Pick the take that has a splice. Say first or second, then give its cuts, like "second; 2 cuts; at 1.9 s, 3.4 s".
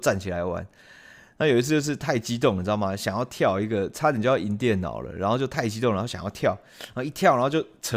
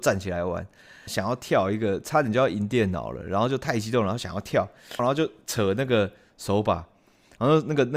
second; 2 cuts; at 1.1 s, 5.0 s